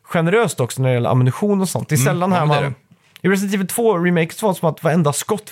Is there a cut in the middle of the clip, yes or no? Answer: no